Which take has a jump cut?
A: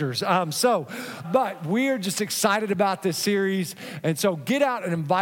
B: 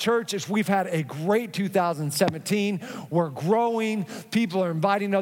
A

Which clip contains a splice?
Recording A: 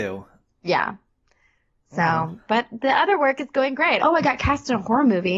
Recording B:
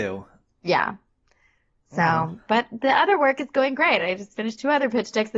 A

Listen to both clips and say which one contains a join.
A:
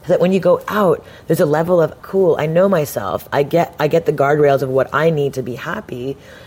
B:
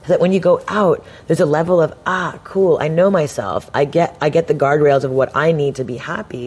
A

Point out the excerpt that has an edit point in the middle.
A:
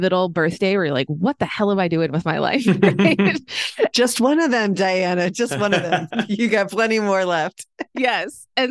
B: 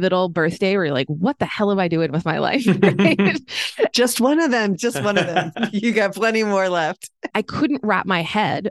B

